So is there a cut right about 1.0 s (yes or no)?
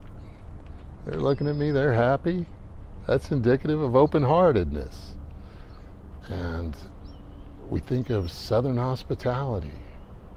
no